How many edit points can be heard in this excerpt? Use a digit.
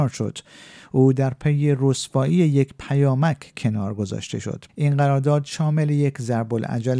1